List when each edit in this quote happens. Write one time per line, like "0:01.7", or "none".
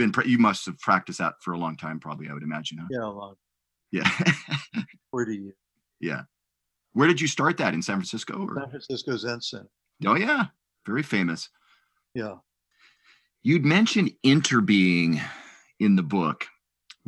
0:06.7